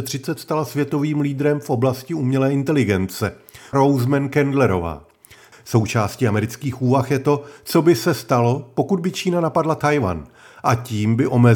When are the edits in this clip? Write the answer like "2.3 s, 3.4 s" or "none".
3.7 s, 5.5 s

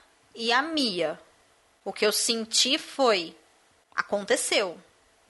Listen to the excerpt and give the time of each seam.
none

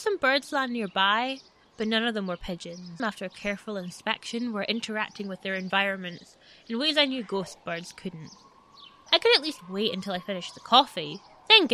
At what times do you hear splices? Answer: 3.0 s, 9.1 s

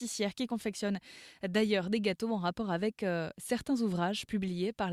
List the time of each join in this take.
none

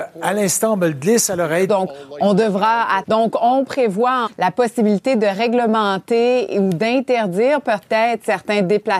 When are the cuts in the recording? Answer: 1.7 s, 3.0 s, 4.3 s

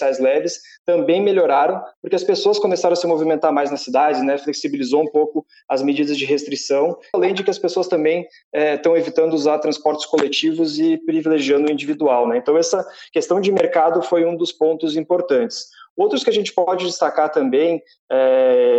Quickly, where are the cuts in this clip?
7.1 s

